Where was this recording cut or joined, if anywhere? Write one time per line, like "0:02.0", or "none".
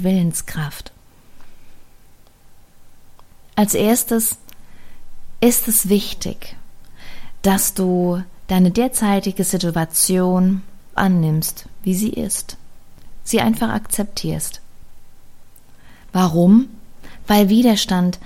0:11.0